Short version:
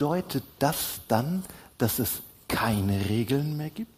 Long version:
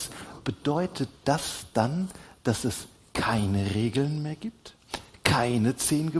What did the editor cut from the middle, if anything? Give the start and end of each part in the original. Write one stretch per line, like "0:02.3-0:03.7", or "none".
none